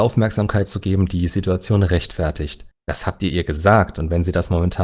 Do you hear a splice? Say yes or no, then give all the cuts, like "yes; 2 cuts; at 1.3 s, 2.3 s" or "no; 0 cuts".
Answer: yes; 1 cut; at 2.7 s